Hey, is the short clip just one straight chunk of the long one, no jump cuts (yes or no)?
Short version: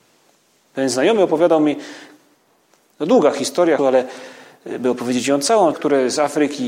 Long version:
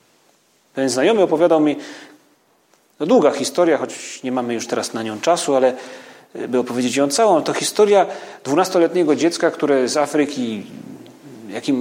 no